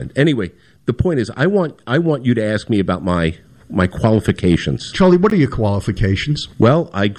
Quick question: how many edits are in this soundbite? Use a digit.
0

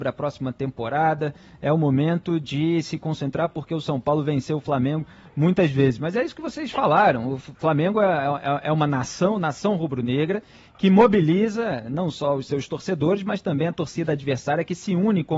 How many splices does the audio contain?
0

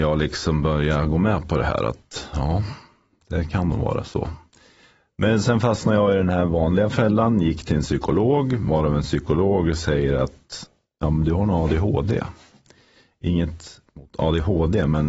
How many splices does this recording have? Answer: 0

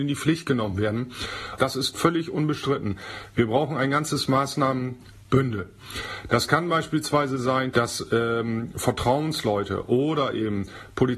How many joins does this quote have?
2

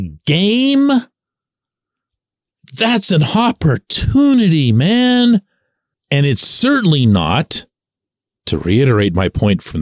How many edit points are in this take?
1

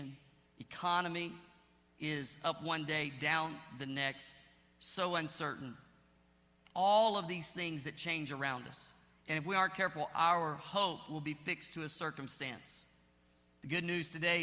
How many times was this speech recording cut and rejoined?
0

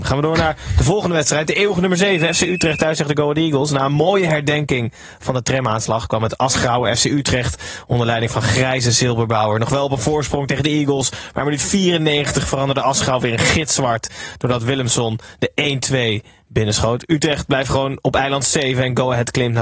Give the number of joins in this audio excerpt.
0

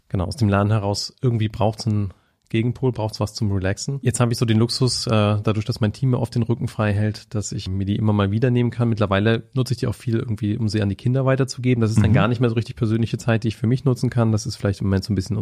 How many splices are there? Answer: 0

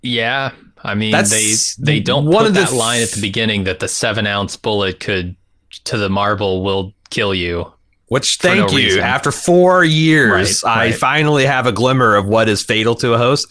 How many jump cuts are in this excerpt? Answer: 0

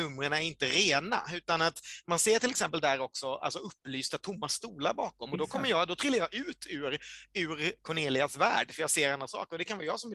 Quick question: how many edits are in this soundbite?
0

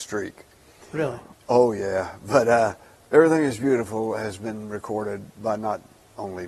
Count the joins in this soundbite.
1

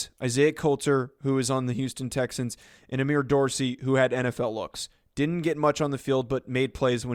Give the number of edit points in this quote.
0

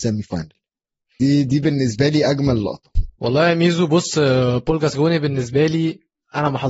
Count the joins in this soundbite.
1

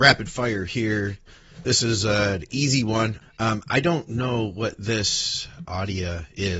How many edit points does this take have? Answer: 2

